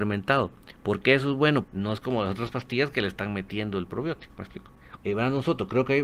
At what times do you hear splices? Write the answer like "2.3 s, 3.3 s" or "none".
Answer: 1.6 s, 5.0 s